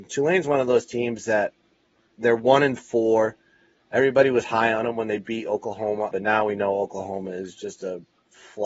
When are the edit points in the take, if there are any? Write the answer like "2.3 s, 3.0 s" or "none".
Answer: 6.1 s